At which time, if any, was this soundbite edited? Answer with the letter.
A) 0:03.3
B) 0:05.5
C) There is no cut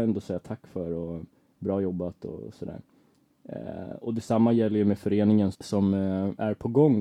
B